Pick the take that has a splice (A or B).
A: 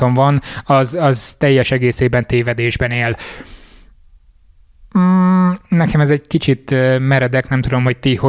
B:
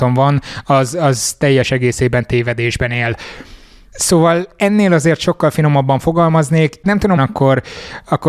B